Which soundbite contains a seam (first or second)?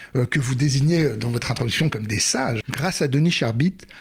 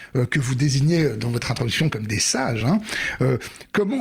first